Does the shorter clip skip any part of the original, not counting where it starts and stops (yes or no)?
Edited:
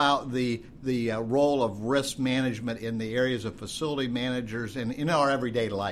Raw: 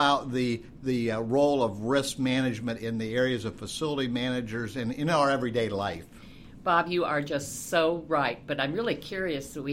no